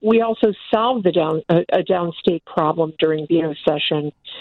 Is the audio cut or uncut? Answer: uncut